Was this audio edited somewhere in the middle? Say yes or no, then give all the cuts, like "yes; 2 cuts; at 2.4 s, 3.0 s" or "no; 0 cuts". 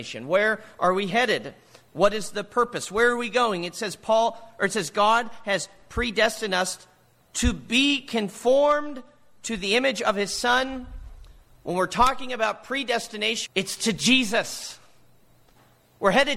yes; 1 cut; at 13.5 s